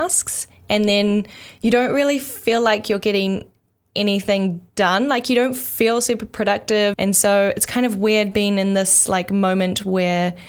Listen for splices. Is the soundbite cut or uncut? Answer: cut